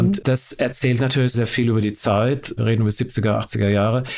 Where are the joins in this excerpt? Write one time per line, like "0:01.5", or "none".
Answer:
0:01.3